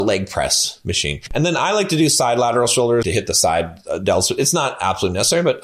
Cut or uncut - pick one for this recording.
cut